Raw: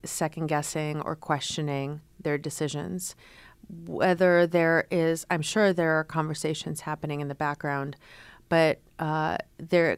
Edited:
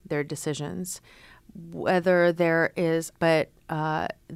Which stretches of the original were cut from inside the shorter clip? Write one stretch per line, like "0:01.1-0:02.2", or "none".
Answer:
0:05.3-0:08.4